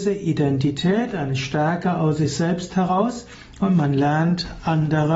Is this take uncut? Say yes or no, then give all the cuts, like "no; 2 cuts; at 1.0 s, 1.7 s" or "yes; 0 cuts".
yes; 0 cuts